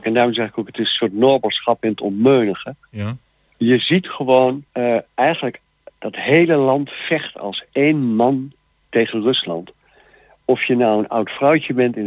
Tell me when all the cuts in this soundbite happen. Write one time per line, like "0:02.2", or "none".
0:04.7